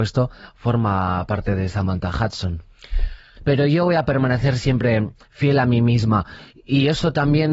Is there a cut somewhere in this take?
yes; 1 cut; at 3.4 s

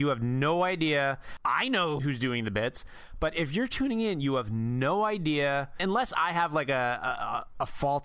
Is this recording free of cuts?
no; 1 cut; at 1.4 s

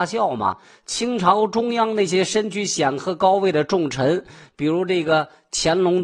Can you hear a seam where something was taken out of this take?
no; 0 cuts

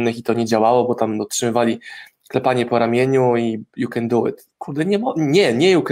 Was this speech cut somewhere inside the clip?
no; 0 cuts

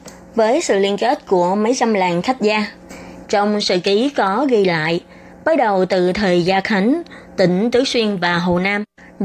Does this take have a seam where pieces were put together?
yes; 1 cut; at 3.2 s

